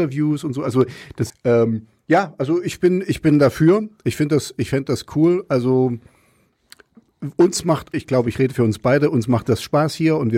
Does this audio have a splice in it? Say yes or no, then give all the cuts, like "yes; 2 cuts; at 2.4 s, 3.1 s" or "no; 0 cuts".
yes; 2 cuts; at 1.3 s, 7.9 s